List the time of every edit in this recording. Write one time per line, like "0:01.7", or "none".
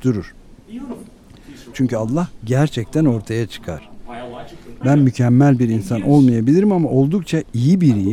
0:01.7
0:04.8